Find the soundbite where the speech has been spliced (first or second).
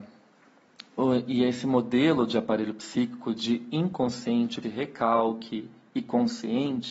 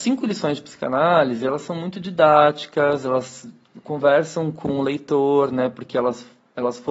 first